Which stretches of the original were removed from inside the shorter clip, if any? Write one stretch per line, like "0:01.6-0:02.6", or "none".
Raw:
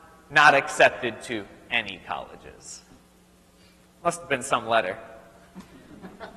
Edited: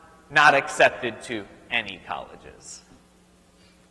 none